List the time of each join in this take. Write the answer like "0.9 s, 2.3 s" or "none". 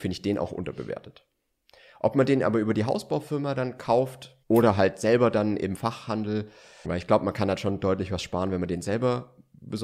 4.4 s, 6.8 s